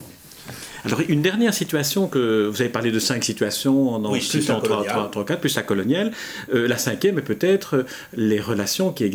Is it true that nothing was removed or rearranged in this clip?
yes; 0 cuts

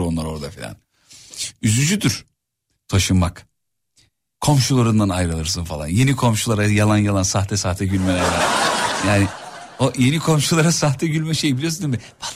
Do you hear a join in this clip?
no; 0 cuts

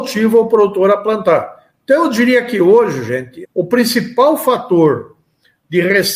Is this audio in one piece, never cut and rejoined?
no; 1 cut; at 3.4 s

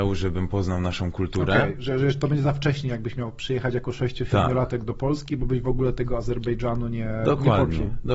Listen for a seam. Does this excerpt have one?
no; 0 cuts

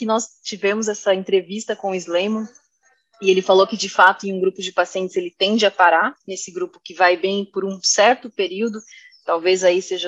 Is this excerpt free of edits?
yes; 0 cuts

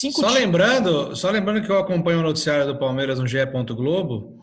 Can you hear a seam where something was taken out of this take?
no; 0 cuts

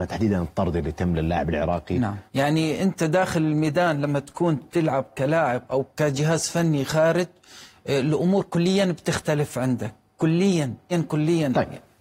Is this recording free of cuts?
no; 2 cuts; at 2.3 s, 10.9 s

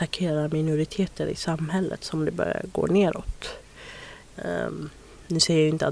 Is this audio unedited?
no; 1 cut; at 4.2 s

